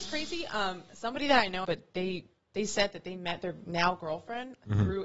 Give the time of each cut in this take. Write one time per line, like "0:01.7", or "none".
0:01.6